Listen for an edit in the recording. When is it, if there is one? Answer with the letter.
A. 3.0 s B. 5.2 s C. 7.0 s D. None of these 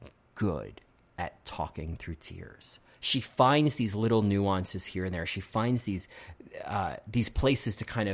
A